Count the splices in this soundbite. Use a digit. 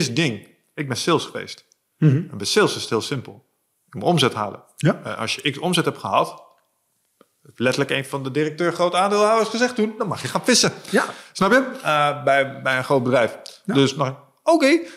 0